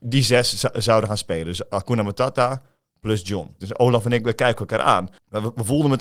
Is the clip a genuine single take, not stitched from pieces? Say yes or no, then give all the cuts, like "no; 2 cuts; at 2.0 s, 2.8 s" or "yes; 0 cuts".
no; 1 cut; at 3.6 s